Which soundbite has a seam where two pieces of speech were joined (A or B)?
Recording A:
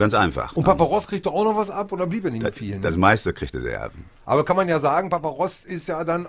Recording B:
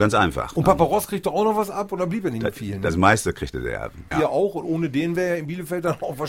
B